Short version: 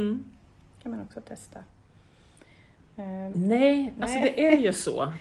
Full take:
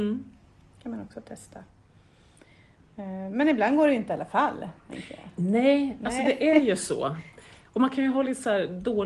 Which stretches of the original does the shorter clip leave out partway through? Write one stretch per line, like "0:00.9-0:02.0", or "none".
0:03.3-0:05.3